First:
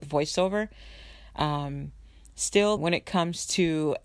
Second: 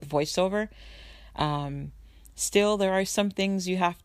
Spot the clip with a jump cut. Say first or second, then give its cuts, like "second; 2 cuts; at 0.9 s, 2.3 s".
first; 1 cut; at 2.8 s